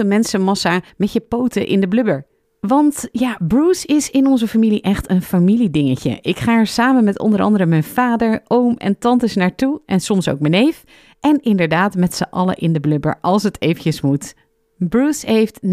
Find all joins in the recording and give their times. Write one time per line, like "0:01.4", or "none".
0:02.4